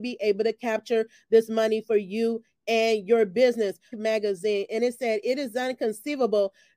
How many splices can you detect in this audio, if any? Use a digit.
1